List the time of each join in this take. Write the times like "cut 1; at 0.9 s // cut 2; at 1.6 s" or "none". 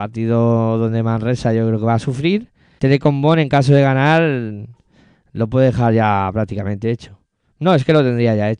cut 1; at 2.8 s